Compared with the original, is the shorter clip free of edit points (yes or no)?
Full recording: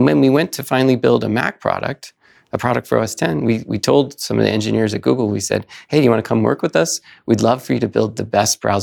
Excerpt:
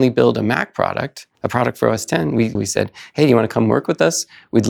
no